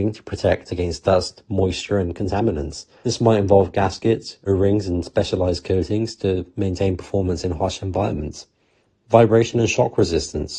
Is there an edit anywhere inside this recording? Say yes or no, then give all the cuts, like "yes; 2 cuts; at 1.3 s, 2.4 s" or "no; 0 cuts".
no; 0 cuts